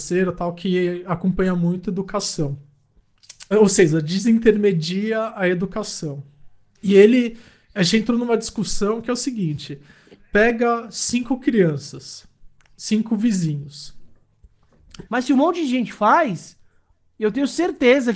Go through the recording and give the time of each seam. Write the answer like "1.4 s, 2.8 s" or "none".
3.5 s, 6.7 s, 15.1 s